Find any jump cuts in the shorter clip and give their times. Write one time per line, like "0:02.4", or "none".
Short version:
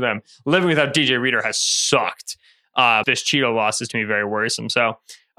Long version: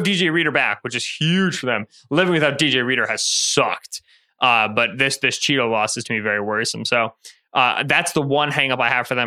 0:03.0